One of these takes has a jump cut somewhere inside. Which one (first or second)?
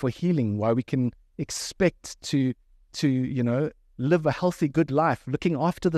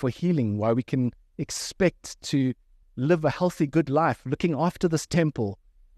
second